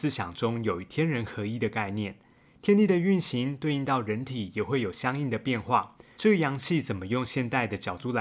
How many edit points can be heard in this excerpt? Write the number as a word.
one